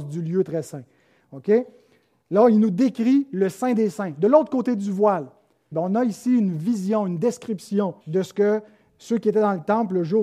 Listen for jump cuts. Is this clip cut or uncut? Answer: cut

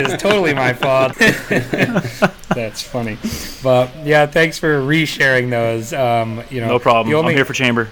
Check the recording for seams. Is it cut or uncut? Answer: cut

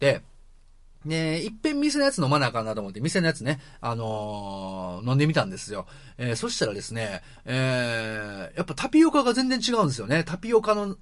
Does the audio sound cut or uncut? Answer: uncut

